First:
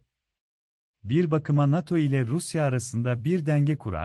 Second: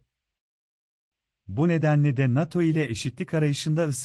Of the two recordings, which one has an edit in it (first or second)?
first